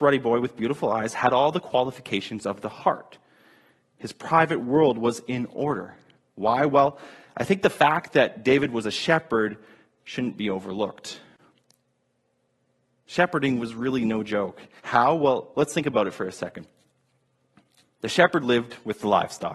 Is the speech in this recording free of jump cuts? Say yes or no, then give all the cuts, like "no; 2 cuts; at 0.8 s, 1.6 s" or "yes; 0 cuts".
no; 1 cut; at 14.8 s